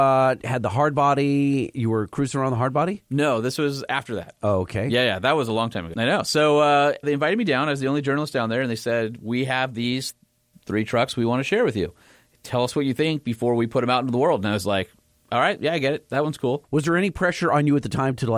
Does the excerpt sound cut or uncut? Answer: cut